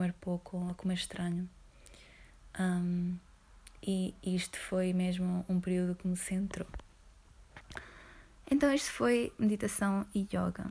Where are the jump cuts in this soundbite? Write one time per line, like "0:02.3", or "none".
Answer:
none